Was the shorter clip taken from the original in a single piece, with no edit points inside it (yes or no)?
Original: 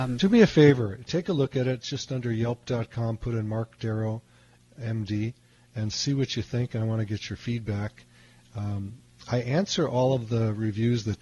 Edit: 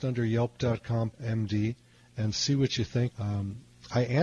no